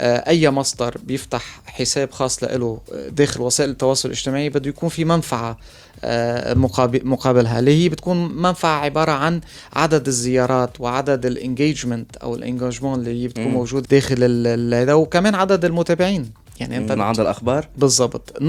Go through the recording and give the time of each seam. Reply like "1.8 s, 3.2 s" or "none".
13.8 s, 17.0 s